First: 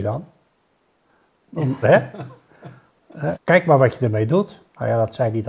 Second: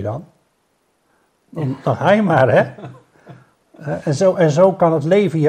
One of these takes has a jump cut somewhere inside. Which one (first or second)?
first